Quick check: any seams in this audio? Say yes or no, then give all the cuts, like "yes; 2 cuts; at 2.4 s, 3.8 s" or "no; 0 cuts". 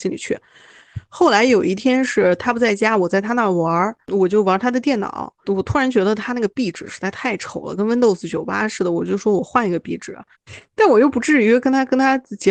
yes; 2 cuts; at 5.4 s, 10.3 s